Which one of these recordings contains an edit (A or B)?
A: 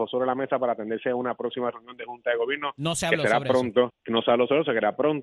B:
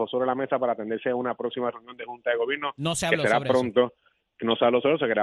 A